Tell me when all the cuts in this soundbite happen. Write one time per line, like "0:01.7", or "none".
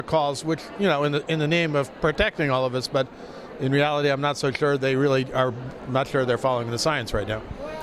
0:05.8